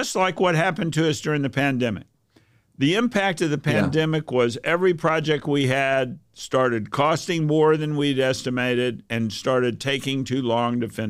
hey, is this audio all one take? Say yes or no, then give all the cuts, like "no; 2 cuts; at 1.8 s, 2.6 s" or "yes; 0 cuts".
yes; 0 cuts